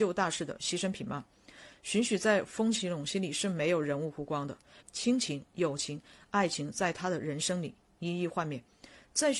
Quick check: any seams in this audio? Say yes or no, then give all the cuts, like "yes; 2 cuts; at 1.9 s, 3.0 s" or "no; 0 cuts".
yes; 1 cut; at 4.8 s